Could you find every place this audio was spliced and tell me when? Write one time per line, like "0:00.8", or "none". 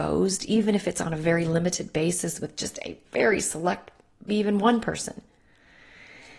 0:04.3